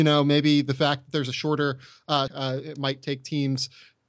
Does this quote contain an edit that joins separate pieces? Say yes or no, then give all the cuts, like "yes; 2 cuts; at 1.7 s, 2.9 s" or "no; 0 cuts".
yes; 1 cut; at 2.3 s